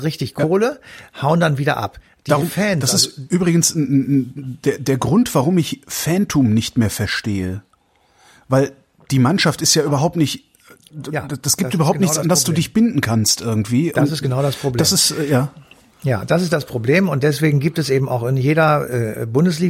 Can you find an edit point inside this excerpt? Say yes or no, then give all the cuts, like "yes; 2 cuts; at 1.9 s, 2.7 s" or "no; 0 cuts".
no; 0 cuts